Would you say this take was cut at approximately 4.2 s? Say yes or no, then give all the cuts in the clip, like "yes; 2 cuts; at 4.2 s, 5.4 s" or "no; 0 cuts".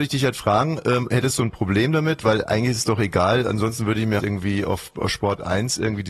yes; 1 cut; at 4.2 s